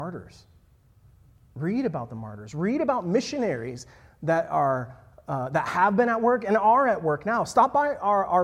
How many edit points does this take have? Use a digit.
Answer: 0